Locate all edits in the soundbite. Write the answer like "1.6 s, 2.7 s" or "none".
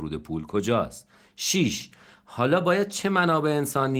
none